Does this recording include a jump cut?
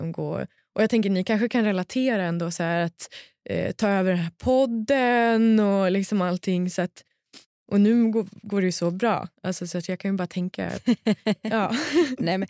no; 0 cuts

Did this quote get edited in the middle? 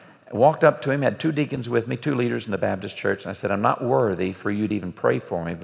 no; 0 cuts

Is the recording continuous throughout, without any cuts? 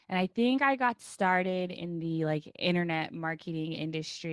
yes; 0 cuts

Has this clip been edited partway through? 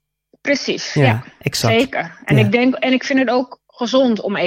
no; 0 cuts

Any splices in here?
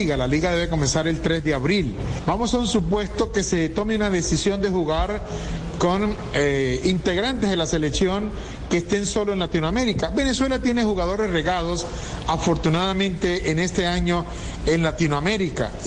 no; 0 cuts

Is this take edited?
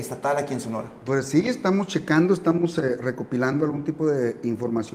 no; 0 cuts

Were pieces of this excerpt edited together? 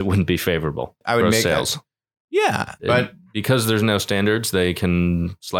yes; 2 cuts; at 1.0 s, 2.8 s

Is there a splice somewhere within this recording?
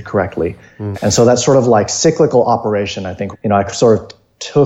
yes; 2 cuts; at 0.9 s, 3.3 s

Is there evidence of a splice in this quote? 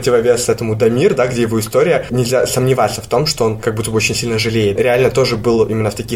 no; 0 cuts

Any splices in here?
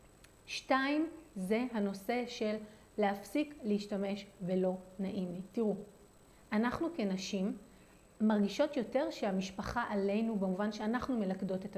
no; 0 cuts

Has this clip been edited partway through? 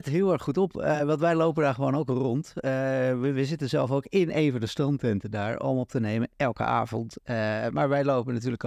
no; 0 cuts

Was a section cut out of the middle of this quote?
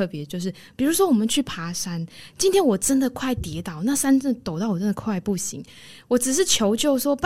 no; 0 cuts

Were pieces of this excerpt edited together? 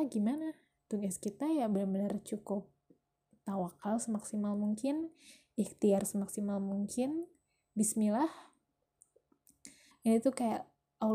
yes; 1 cut; at 9.9 s

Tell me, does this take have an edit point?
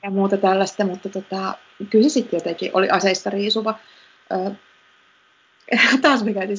no; 0 cuts

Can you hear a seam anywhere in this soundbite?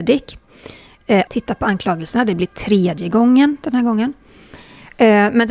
yes; 1 cut; at 1.3 s

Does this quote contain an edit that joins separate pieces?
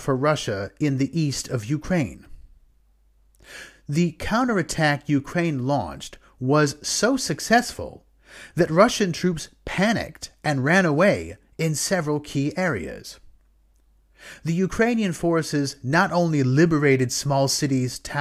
no; 0 cuts

